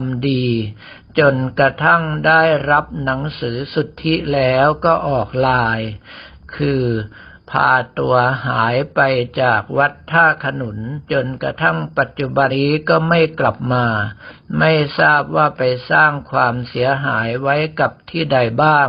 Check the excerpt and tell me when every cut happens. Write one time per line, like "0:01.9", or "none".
0:11.0
0:12.5